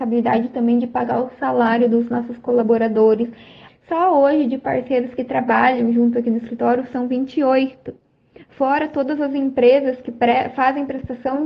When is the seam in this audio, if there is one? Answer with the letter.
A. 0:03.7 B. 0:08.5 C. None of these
A